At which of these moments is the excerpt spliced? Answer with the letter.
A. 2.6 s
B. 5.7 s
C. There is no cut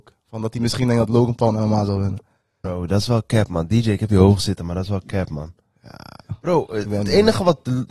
A